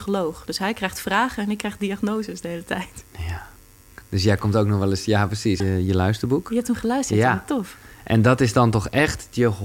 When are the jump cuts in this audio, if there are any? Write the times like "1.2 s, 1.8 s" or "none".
5.6 s